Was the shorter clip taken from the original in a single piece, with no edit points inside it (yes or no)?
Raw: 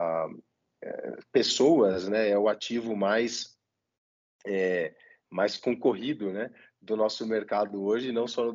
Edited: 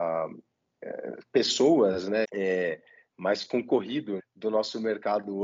no